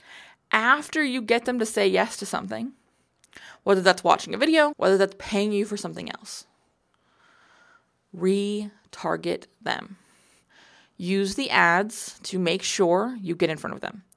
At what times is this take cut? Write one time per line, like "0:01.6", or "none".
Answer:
0:04.7